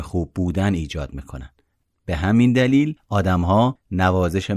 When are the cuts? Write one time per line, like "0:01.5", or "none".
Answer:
0:01.8